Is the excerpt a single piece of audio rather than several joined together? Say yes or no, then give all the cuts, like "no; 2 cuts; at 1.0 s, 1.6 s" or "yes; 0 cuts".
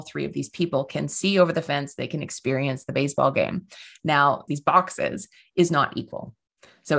no; 1 cut; at 4.5 s